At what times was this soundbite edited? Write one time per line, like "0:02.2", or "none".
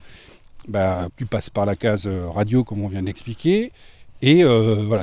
0:01.1

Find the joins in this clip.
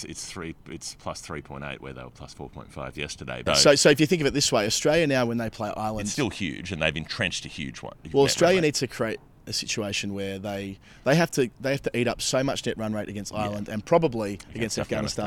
0:03.5

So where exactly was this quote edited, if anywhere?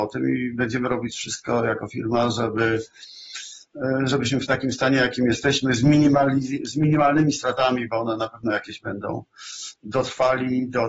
none

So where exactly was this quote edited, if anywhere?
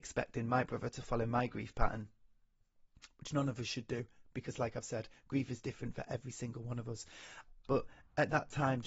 0:07.7

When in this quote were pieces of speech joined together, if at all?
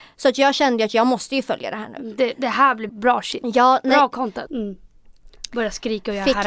0:02.9
0:04.5

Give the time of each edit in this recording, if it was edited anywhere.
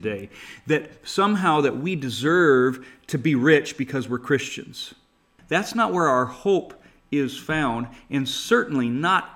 0:05.4

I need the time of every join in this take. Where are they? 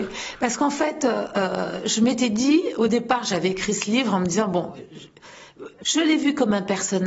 0:05.8

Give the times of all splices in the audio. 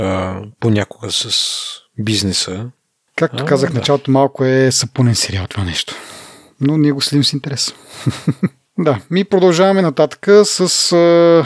none

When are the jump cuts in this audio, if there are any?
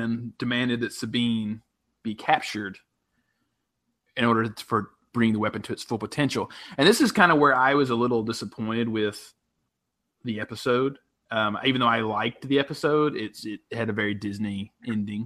none

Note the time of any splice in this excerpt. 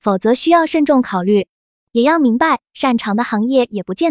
0:02.6

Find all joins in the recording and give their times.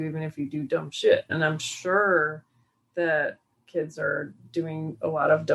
0:01.3

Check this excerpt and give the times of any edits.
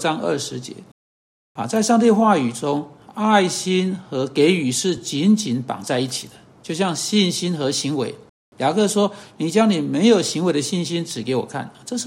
none

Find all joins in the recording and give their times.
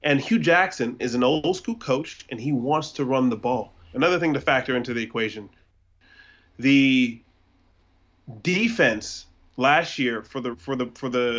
0:01.0
0:03.9

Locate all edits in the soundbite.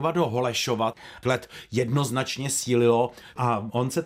0:01.2

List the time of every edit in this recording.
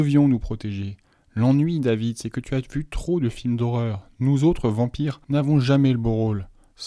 0:05.2

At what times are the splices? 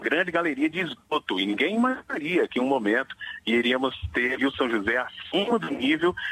0:04.4

